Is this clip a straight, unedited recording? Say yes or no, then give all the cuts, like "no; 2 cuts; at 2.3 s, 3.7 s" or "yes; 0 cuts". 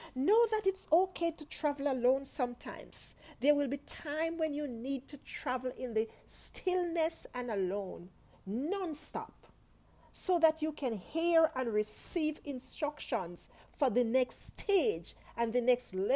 yes; 0 cuts